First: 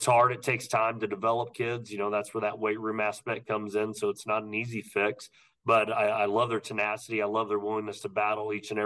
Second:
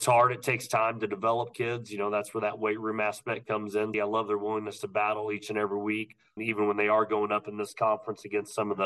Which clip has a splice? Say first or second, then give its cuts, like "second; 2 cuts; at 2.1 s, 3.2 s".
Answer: second; 2 cuts; at 3.9 s, 6.4 s